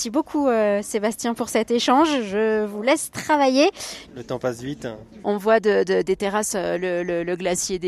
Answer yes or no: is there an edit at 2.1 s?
no